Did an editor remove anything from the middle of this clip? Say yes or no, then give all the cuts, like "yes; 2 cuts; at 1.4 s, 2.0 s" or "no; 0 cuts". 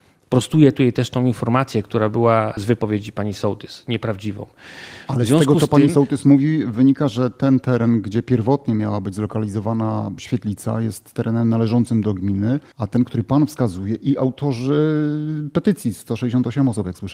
yes; 1 cut; at 5.1 s